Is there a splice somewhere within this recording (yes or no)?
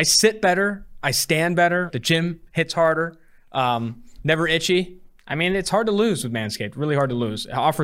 yes